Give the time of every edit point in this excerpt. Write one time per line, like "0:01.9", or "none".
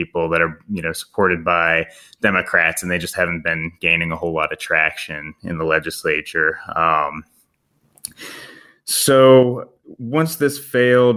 none